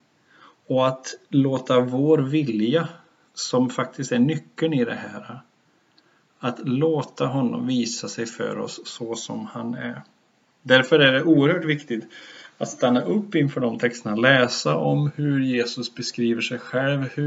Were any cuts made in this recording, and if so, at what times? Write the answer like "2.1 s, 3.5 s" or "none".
none